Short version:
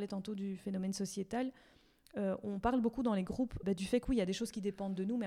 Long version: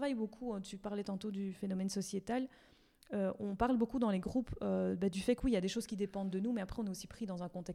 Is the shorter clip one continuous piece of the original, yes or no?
no